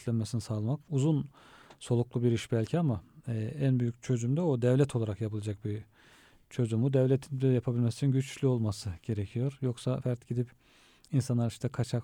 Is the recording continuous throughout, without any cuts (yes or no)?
no